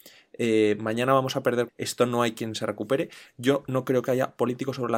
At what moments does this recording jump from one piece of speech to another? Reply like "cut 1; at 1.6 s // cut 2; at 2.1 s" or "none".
cut 1; at 1.7 s